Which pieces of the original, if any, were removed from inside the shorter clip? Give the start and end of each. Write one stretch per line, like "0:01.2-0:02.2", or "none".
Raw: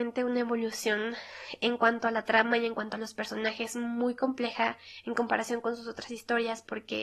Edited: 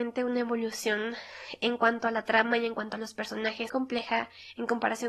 0:03.7-0:04.2